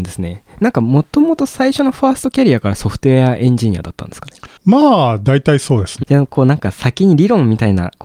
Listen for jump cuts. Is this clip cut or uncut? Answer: cut